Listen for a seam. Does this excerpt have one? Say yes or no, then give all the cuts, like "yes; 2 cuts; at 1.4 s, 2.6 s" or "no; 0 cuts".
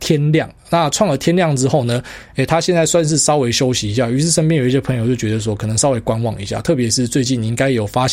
no; 0 cuts